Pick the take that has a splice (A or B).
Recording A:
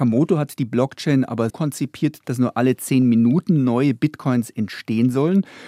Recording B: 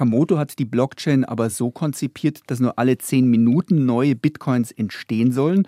A